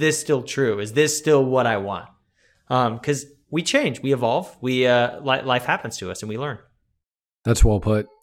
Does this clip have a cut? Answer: no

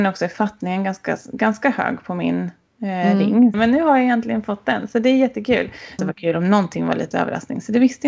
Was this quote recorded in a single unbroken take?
no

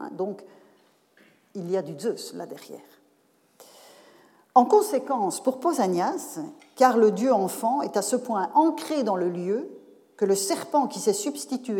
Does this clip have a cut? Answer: yes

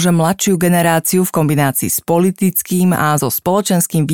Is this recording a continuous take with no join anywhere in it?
yes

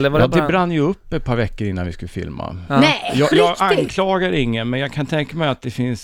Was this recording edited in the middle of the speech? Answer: yes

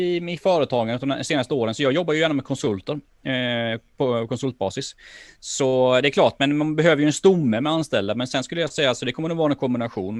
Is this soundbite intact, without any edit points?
yes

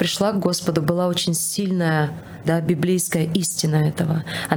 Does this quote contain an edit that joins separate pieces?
yes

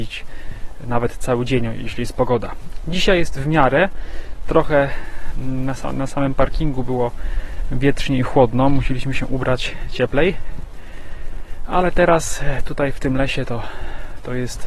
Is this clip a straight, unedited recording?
yes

